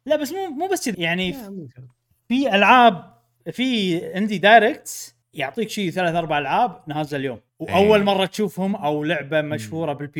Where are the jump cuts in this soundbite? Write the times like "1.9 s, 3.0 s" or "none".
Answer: 0.9 s, 5.2 s, 7.5 s